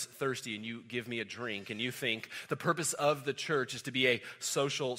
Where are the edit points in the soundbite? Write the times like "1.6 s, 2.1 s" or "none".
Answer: none